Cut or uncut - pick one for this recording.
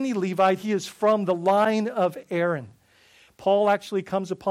cut